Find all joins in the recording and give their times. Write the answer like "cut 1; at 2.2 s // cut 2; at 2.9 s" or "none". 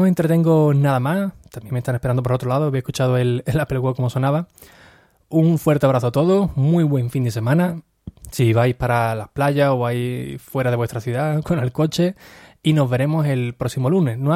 cut 1; at 11.4 s